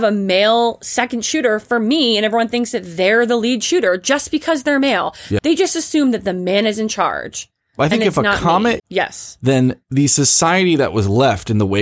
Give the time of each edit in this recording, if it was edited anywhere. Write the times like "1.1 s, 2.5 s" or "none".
5.4 s, 8.8 s